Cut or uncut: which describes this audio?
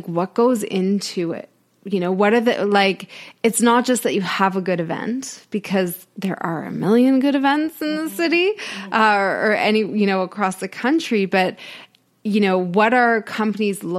uncut